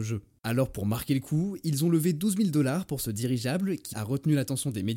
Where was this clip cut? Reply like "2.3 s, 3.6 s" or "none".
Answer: 3.9 s